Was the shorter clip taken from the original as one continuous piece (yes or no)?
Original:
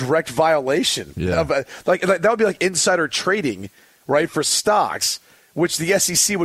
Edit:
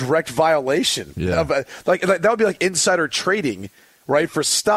yes